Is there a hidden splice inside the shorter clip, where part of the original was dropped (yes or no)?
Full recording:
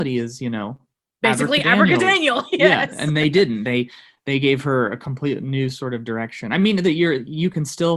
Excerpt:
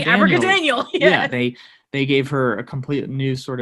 yes